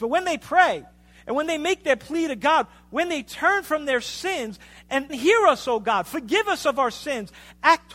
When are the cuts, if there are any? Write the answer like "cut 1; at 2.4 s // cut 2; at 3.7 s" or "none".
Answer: cut 1; at 5.1 s